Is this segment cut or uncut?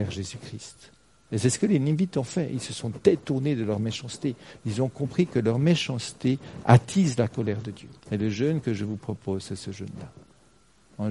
cut